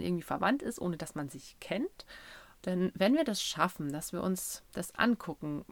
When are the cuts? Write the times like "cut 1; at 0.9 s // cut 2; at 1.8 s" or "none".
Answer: cut 1; at 2.6 s